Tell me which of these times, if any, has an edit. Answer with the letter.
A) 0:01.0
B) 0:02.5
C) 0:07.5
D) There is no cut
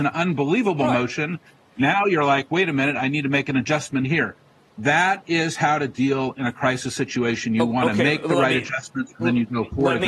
D